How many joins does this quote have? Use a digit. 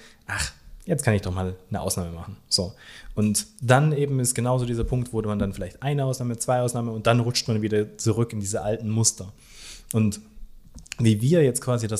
0